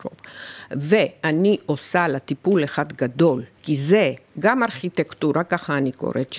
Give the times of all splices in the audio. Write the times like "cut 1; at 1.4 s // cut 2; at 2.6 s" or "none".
cut 1; at 3.5 s